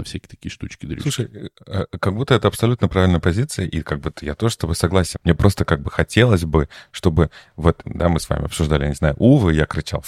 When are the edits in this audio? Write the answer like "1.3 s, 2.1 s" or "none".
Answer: 5.1 s